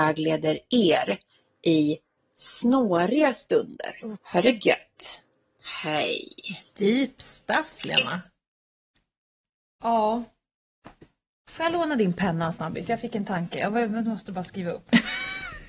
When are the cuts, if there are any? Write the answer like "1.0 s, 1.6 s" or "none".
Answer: 4.2 s